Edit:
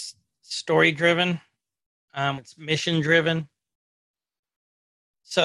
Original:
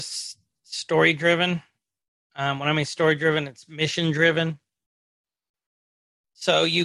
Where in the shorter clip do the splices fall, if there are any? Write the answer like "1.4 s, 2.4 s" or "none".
2.4 s